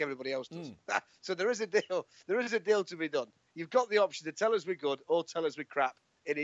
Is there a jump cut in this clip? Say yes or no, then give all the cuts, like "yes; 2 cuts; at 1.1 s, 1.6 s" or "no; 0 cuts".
no; 0 cuts